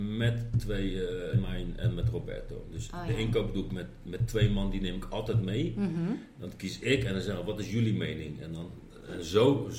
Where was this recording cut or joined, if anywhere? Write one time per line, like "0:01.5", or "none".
0:01.3